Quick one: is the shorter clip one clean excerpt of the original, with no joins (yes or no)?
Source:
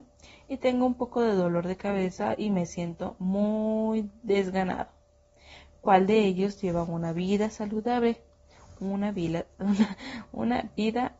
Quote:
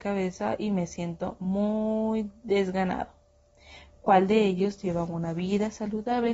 yes